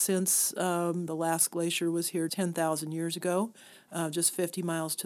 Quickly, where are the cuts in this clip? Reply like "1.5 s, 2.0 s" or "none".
1.1 s, 2.3 s